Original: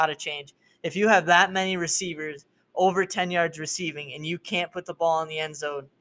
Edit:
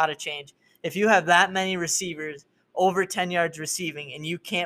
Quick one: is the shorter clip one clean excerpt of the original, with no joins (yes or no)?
yes